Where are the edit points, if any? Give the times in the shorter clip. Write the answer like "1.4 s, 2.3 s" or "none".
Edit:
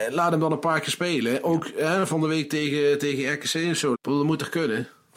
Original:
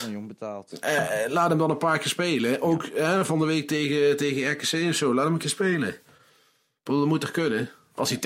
3.9 s